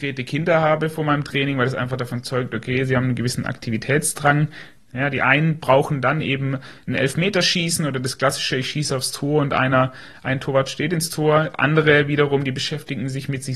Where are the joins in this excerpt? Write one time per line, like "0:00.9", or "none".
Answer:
0:04.8